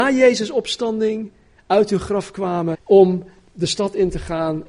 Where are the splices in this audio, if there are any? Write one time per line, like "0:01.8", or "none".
0:02.7